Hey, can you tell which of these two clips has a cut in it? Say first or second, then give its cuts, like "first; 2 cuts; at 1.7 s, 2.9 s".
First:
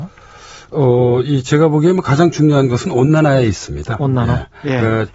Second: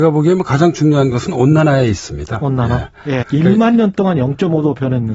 second; 1 cut; at 3.2 s